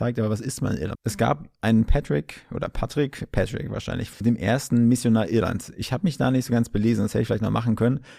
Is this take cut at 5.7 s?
no; 2 cuts; at 0.9 s, 4.1 s

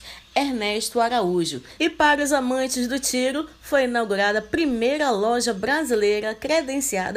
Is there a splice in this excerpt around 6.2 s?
no; 1 cut; at 1.8 s

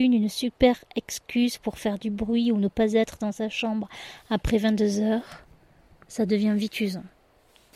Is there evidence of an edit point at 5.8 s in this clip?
no; 0 cuts

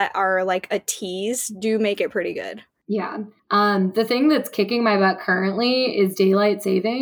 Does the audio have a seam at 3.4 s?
yes; 1 cut; at 3.4 s

